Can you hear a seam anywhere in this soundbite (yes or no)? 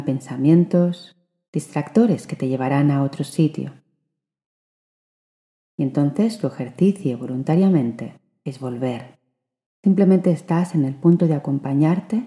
yes